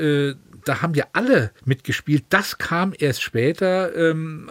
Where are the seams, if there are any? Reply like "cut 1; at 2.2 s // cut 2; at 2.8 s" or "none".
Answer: cut 1; at 1.6 s